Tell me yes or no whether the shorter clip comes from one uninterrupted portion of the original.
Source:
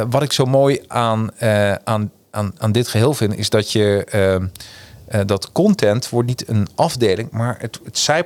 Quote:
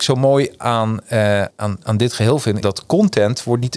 no